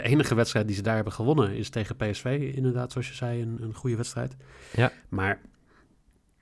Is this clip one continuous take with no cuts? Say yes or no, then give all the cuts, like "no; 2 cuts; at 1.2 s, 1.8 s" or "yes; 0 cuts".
yes; 0 cuts